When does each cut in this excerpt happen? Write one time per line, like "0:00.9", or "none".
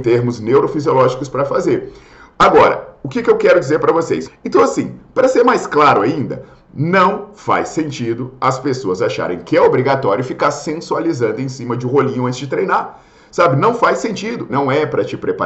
0:04.3
0:14.5